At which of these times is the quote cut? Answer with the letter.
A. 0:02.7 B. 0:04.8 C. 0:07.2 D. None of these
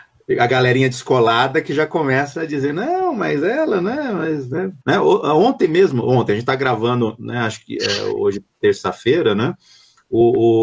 B